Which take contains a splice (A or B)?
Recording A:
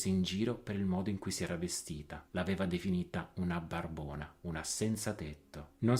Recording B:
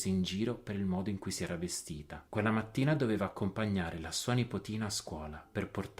B